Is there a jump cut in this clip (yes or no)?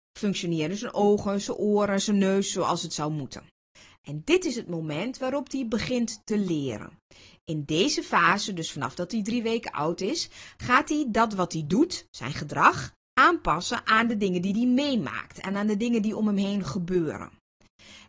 no